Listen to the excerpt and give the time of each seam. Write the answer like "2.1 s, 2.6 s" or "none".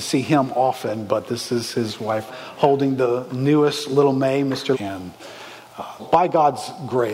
2.3 s, 4.7 s, 6.0 s